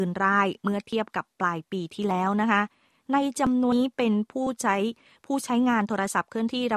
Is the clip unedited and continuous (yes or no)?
no